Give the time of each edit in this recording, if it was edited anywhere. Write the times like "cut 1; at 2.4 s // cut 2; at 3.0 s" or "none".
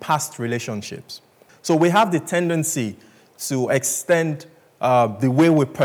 cut 1; at 1.5 s

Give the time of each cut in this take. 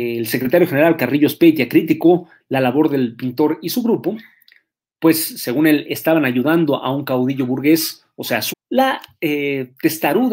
cut 1; at 8.5 s

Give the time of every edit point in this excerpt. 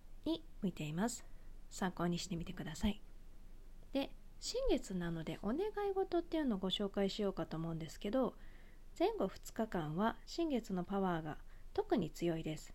none

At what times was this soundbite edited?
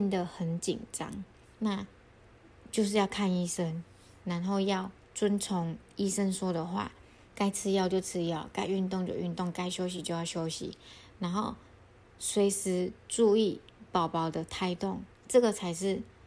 cut 1; at 1.4 s // cut 2; at 7.3 s // cut 3; at 15.2 s

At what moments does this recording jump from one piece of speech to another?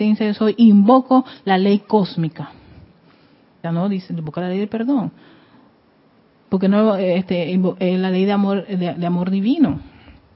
cut 1; at 3.6 s

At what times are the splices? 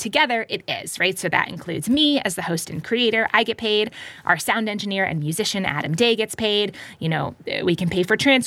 none

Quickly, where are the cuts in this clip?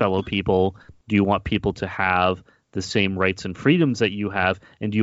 cut 1; at 1.0 s

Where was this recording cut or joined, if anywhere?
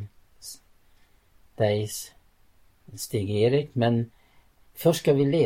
none

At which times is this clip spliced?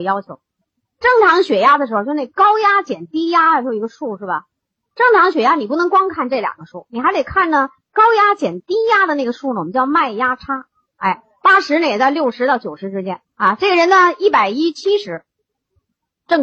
cut 1; at 10.9 s // cut 2; at 13.2 s

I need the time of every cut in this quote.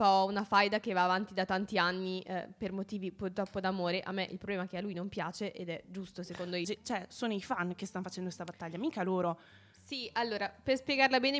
cut 1; at 6.6 s

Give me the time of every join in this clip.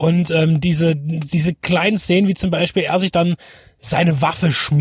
none

